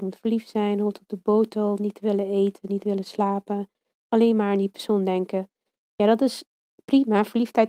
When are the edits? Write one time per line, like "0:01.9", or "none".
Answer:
none